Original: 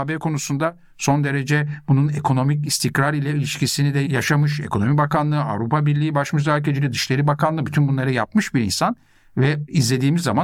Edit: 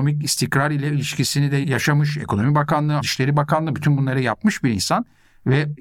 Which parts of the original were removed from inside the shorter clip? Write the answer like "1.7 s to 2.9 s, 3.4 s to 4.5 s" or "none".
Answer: 5.4 s to 6.9 s